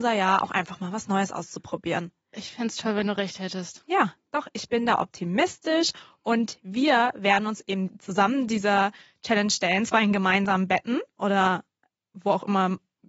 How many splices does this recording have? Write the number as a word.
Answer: zero